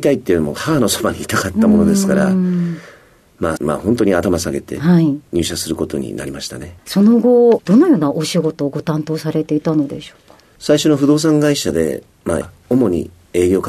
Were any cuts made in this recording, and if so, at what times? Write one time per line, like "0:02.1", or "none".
0:03.6
0:12.4